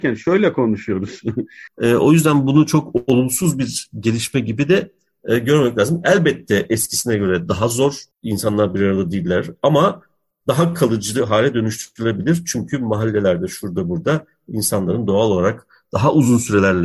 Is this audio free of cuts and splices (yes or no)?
no